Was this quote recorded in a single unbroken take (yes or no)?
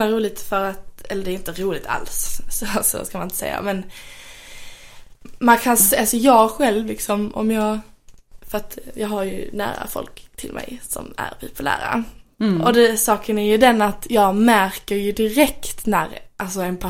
yes